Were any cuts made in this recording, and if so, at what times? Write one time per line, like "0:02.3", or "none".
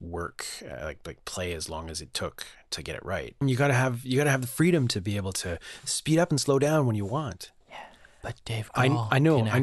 0:03.4
0:07.6